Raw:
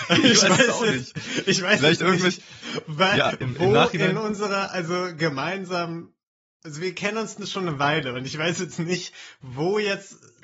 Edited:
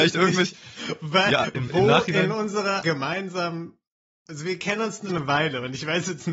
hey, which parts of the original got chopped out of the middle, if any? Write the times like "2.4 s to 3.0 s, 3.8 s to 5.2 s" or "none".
4.7 s to 5.2 s, 7.4 s to 7.6 s